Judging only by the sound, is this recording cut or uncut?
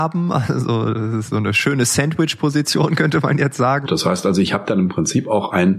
cut